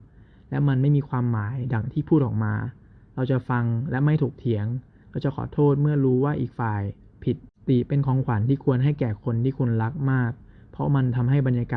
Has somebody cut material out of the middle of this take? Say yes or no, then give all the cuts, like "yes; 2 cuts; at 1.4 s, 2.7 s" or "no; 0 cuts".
no; 0 cuts